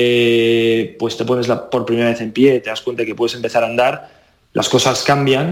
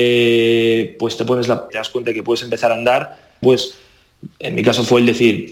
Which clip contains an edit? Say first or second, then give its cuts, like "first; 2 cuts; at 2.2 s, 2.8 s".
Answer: second; 2 cuts; at 1.7 s, 3.4 s